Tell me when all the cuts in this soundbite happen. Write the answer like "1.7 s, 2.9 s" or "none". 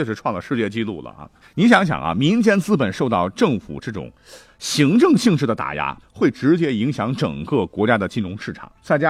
1.4 s, 6.0 s